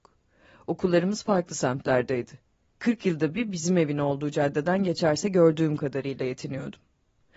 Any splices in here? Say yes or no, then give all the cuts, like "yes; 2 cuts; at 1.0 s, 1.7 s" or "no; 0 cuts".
no; 0 cuts